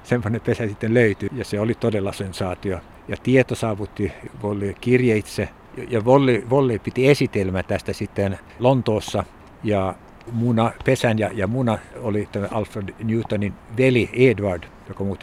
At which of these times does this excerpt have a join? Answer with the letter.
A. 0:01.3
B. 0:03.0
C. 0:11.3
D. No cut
A